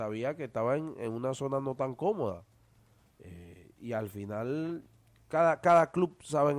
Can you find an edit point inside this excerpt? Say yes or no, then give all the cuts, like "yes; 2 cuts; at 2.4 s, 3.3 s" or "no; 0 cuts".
yes; 1 cut; at 3.1 s